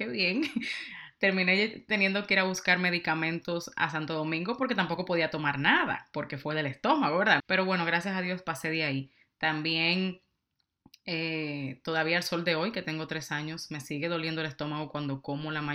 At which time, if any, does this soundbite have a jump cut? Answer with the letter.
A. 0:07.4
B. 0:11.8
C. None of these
A